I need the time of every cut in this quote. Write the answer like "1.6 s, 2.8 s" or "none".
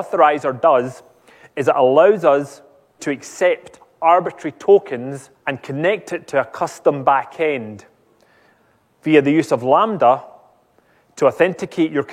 3.0 s, 5.4 s